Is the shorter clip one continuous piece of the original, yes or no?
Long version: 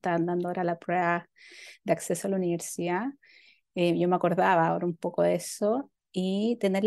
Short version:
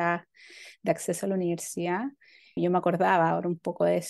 no